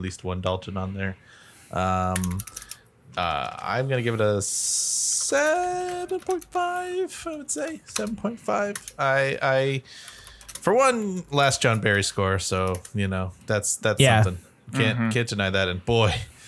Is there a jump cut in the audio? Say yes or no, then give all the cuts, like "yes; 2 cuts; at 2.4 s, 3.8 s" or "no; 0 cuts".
no; 0 cuts